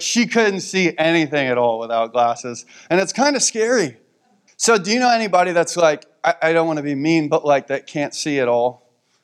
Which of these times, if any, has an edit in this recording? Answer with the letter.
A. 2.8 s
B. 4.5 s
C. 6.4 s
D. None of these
B